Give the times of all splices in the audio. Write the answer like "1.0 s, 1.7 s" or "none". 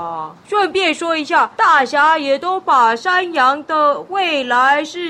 none